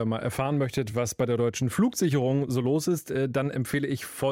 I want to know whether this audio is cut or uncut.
uncut